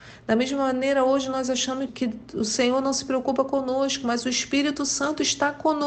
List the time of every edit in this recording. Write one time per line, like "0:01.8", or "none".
0:01.9